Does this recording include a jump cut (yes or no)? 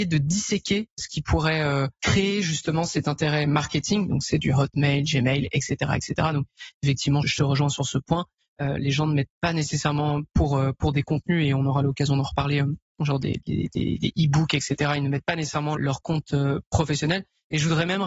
yes